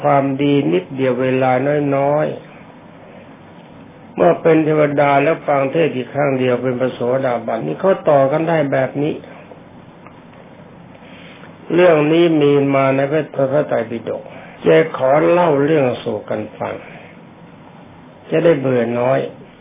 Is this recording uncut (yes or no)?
no